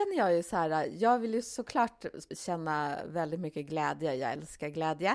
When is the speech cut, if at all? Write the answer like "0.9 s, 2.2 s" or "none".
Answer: 2.3 s